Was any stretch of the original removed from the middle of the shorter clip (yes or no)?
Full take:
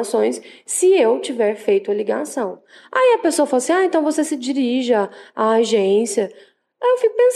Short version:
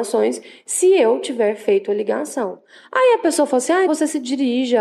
yes